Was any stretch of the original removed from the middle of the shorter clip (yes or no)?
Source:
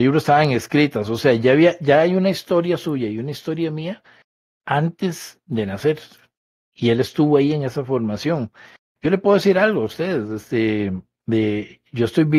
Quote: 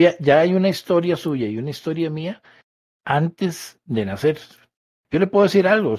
yes